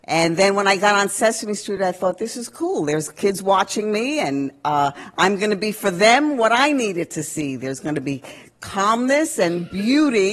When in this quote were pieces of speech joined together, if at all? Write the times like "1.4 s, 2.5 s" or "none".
none

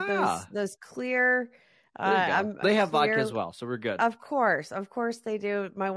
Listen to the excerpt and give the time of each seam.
2.6 s

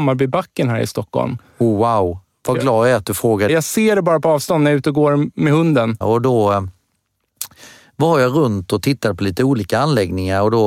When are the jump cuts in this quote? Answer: 3.5 s, 6.0 s

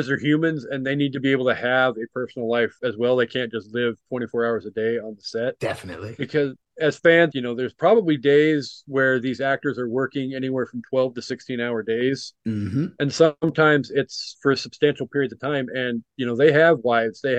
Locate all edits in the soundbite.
7.3 s

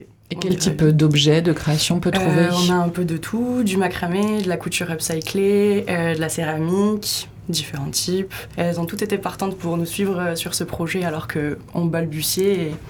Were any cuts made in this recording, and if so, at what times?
8.5 s

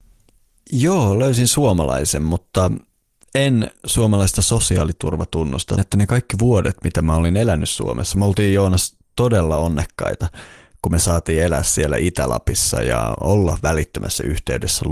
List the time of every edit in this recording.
5.8 s

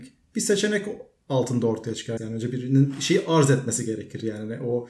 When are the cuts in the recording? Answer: 2.2 s

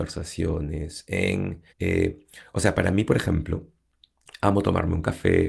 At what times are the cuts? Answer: 1.7 s

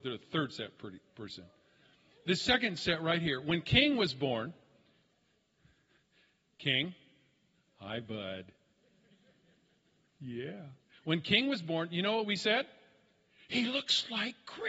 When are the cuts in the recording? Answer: none

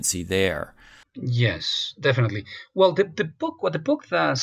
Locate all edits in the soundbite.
1.0 s

